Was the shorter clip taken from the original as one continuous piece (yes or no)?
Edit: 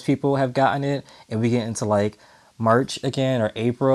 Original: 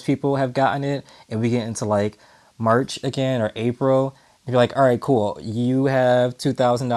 yes